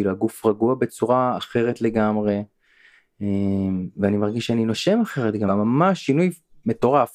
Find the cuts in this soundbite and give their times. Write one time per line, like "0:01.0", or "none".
0:05.5